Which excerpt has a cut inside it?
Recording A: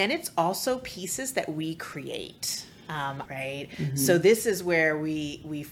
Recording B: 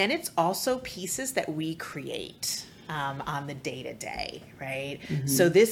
A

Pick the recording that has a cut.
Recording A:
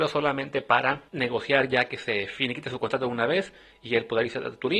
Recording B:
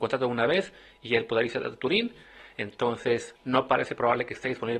A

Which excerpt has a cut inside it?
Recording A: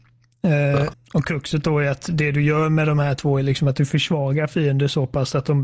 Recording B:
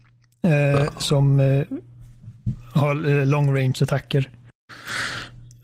A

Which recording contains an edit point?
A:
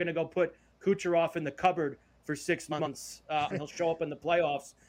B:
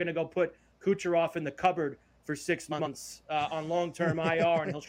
A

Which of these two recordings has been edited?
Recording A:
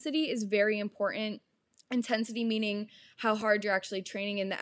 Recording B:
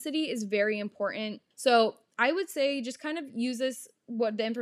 B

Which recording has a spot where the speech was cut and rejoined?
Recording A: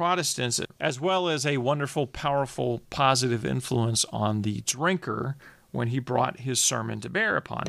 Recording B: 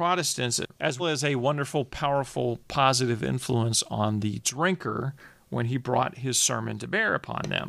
B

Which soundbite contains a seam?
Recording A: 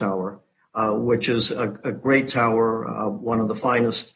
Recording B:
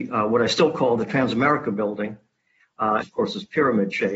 B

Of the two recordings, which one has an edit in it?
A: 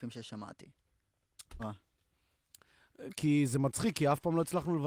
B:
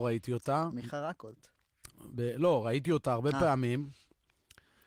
A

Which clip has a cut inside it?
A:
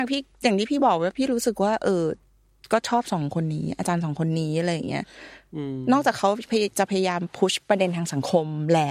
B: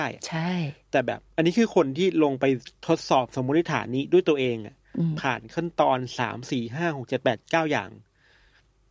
B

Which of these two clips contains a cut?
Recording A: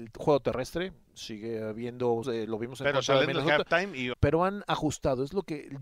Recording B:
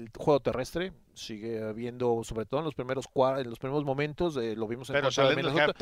A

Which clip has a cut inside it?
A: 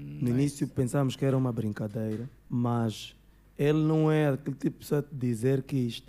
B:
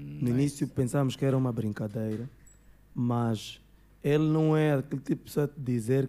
A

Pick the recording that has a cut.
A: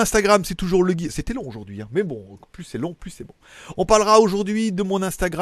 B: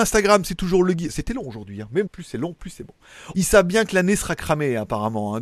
B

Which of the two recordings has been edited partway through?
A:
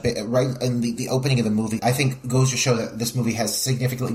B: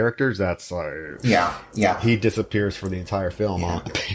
A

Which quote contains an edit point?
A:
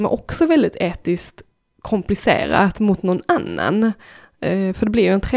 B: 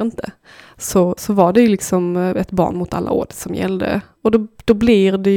B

